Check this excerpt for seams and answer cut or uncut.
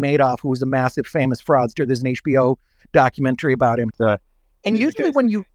cut